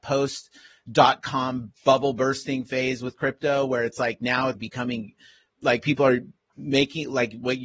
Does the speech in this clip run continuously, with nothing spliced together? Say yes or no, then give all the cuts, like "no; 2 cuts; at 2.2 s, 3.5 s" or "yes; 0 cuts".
no; 1 cut; at 4.5 s